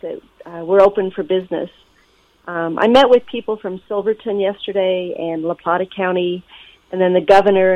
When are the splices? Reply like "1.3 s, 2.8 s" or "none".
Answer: none